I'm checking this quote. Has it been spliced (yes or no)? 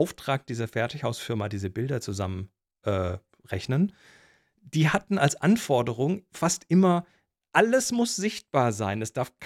no